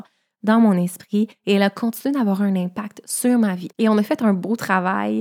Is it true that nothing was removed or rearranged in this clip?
no; 1 cut; at 3.7 s

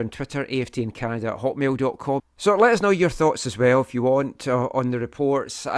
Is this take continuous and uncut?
no; 1 cut; at 2.2 s

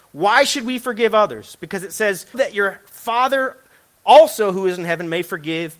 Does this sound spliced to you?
yes; 1 cut; at 2.3 s

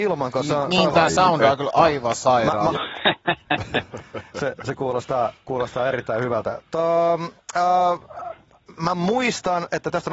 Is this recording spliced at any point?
yes; 1 cut; at 2.7 s

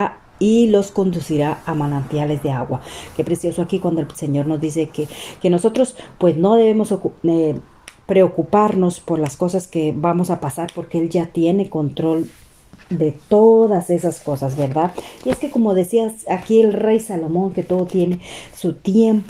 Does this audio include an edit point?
no; 0 cuts

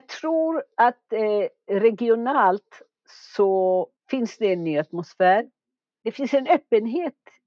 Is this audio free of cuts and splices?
yes; 0 cuts

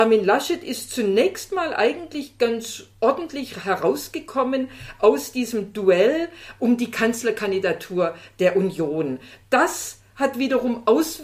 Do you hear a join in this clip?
yes; 1 cut; at 9.4 s

